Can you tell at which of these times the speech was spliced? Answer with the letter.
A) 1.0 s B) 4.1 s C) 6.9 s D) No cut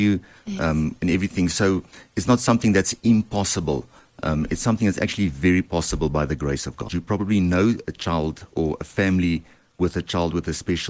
C